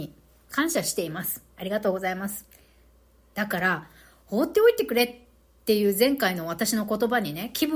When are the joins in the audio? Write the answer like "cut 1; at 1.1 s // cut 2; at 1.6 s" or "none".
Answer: cut 1; at 1.5 s